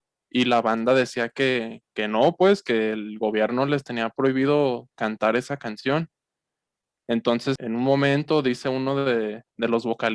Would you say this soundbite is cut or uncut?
uncut